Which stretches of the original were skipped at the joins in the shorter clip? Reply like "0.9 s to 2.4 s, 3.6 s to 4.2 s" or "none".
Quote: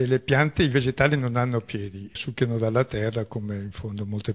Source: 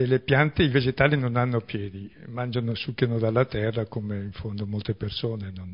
2.1 s to 2.8 s